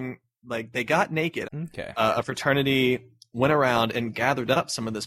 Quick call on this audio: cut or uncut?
cut